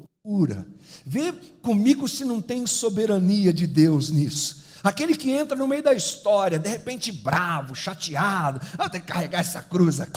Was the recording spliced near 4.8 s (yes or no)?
no